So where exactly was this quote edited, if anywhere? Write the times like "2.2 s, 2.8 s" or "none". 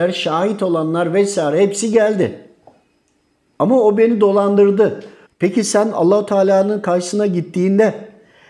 3.5 s, 5.3 s